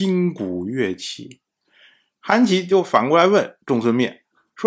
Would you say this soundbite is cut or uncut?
cut